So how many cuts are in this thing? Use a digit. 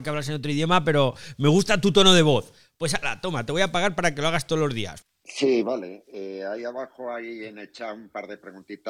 1